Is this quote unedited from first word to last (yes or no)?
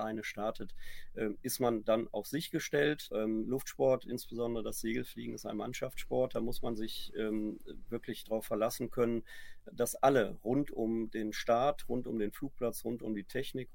no